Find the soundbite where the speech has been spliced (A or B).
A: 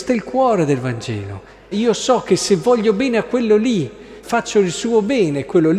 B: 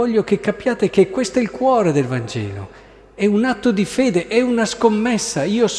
A